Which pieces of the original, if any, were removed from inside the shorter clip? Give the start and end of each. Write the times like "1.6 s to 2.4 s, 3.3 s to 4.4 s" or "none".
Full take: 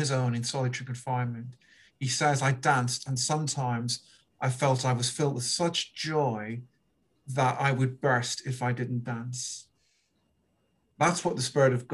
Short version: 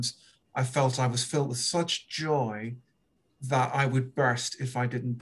none